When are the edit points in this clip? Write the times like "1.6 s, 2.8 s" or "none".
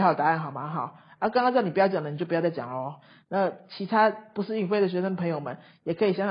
none